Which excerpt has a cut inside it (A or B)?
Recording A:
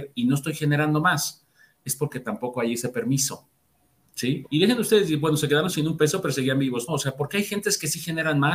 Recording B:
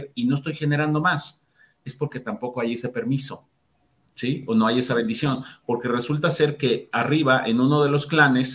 A